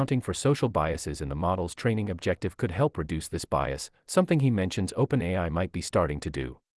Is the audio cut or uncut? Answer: uncut